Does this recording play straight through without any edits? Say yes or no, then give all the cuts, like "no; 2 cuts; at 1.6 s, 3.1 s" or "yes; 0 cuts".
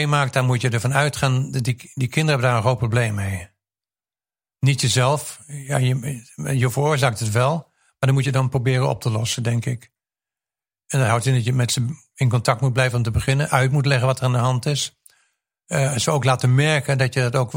yes; 0 cuts